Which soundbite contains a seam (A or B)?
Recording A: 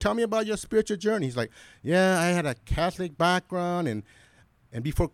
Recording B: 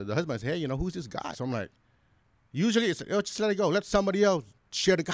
B